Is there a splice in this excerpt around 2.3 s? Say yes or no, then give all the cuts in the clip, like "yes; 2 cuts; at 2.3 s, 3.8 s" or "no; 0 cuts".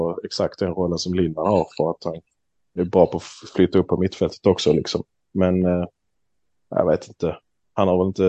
no; 0 cuts